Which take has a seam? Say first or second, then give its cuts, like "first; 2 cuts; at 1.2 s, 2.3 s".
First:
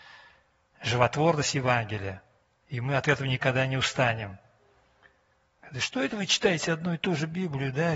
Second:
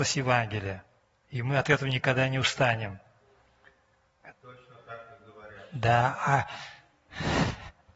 second; 1 cut; at 4.3 s